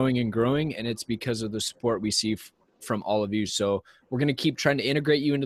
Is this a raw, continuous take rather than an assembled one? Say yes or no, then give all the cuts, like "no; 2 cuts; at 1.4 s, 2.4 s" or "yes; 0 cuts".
yes; 0 cuts